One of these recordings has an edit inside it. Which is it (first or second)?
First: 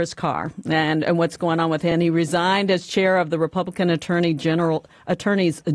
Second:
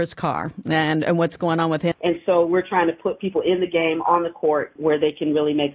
second